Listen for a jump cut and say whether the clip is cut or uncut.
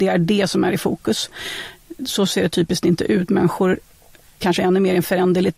uncut